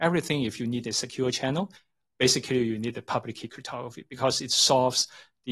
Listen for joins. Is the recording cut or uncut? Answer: uncut